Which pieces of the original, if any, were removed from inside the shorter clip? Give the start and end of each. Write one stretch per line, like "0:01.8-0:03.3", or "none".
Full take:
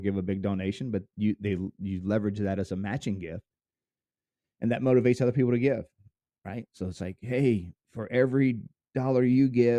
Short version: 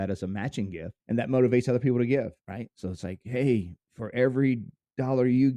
0:03.5-0:04.5
0:05.9-0:06.4